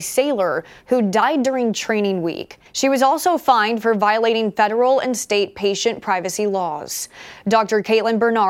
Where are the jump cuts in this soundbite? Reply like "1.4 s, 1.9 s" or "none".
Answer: 2.7 s